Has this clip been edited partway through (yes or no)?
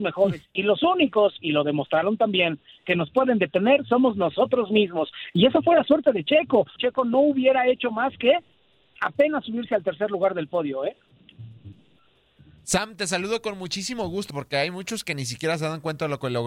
yes